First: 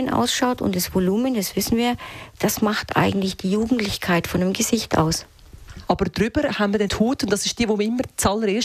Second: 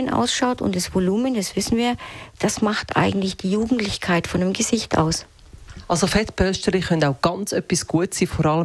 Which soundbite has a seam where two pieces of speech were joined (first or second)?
first